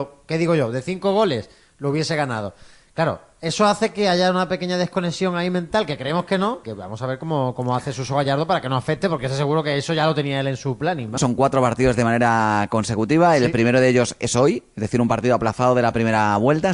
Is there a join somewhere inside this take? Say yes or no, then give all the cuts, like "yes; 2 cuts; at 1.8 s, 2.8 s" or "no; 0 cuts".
yes; 2 cuts; at 6.6 s, 11.2 s